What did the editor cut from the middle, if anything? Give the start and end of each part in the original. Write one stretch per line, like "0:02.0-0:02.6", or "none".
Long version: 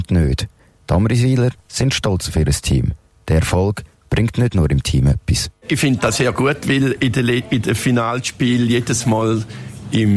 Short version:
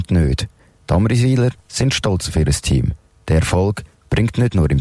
none